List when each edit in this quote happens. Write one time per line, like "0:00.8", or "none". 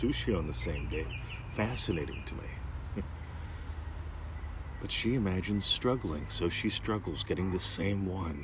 none